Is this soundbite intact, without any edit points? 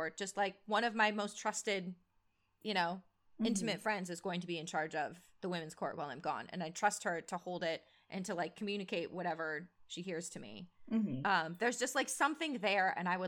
yes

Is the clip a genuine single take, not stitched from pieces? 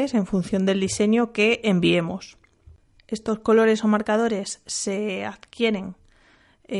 yes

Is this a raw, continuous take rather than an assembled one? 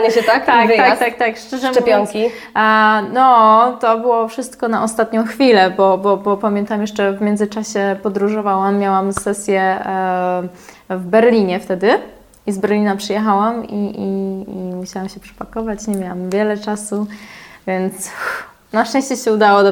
yes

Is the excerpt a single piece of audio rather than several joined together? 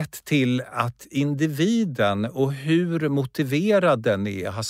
yes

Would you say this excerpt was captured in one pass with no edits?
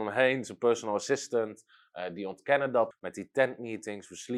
no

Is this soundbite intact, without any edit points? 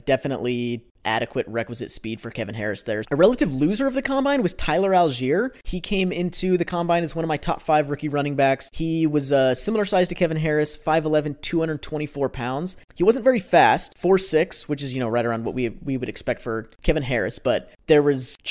no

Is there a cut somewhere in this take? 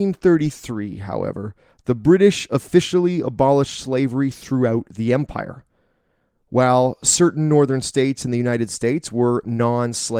no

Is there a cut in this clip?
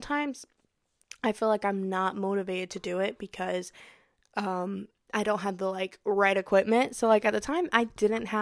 no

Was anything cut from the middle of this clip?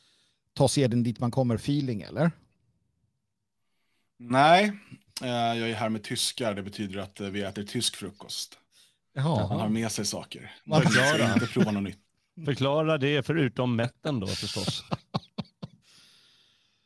no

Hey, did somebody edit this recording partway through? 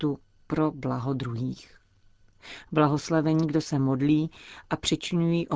no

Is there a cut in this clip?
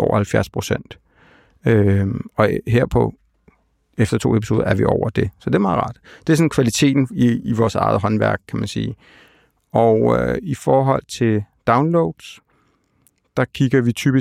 no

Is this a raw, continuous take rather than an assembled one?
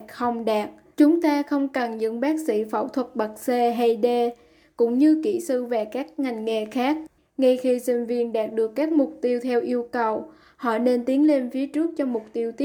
no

